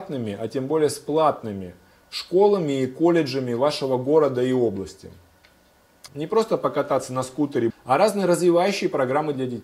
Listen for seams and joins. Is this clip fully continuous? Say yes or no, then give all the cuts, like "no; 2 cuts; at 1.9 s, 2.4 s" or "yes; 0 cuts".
no; 2 cuts; at 6.1 s, 7.7 s